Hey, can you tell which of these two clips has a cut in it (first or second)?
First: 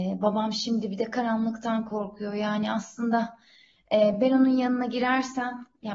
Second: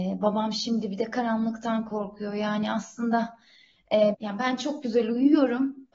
second